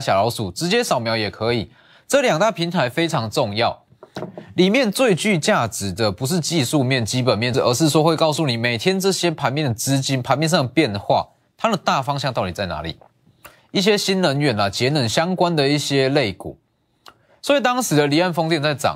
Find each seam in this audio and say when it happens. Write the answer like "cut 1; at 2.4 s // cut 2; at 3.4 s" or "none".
cut 1; at 7.5 s // cut 2; at 13.6 s